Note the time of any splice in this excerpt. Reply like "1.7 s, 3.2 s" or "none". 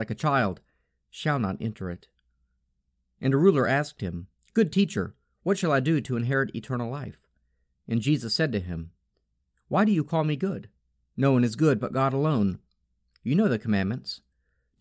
none

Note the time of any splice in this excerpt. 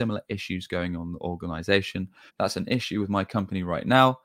2.3 s

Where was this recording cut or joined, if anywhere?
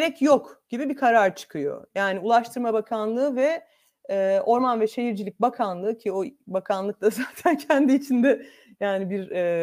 none

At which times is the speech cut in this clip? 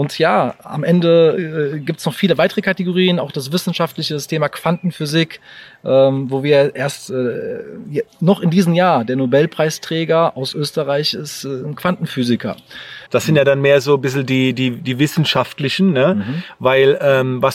13.1 s

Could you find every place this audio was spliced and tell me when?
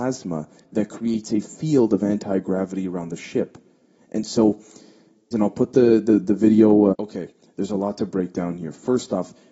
5.3 s, 6.9 s

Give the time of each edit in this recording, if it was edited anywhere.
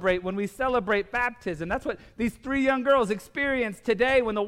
none

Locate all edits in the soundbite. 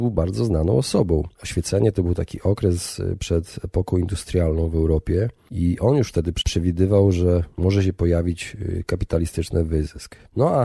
1.3 s

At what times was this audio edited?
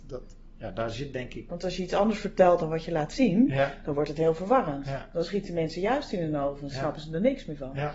1.5 s

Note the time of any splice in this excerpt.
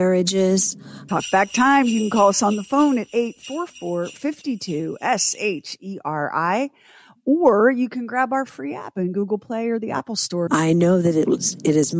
1.1 s, 10.5 s

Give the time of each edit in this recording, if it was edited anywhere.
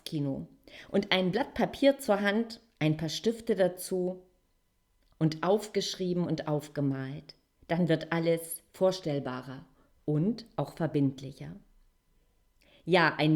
none

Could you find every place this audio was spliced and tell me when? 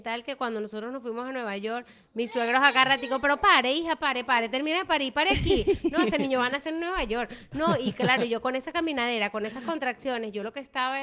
none

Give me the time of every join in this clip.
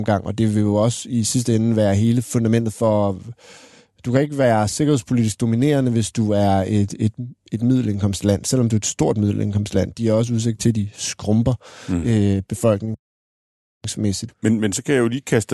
14.3 s

